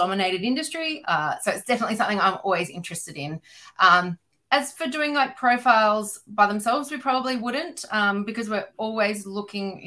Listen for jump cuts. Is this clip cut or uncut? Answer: cut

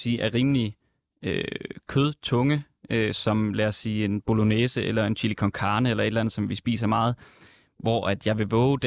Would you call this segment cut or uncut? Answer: uncut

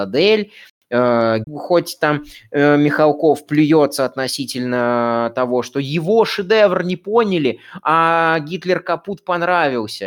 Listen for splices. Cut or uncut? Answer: cut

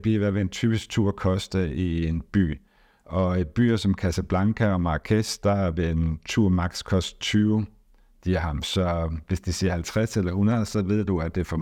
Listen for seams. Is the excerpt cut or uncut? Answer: uncut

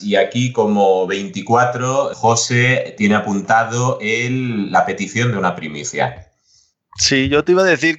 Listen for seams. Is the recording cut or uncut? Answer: cut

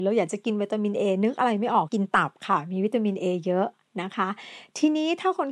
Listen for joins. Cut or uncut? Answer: cut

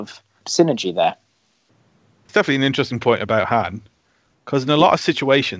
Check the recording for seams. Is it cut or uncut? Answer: cut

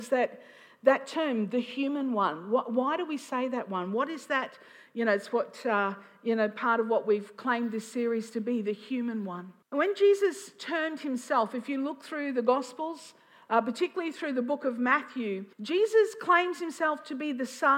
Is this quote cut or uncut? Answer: cut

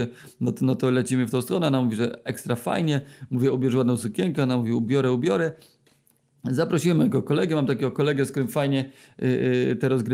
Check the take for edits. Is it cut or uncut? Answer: uncut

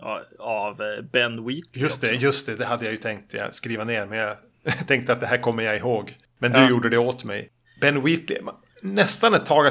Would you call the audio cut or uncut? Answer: uncut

